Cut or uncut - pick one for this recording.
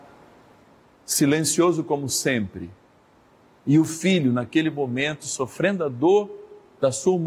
uncut